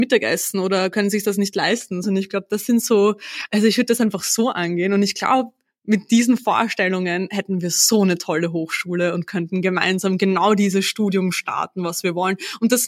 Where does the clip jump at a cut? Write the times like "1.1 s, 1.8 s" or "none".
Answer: 2.0 s